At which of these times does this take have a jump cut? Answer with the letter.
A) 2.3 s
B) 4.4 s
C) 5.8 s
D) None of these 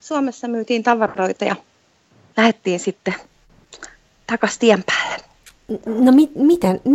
A